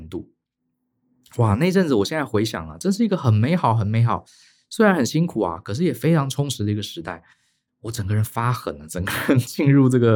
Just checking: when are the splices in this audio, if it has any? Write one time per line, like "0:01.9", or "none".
none